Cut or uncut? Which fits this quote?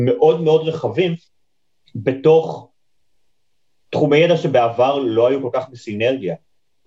uncut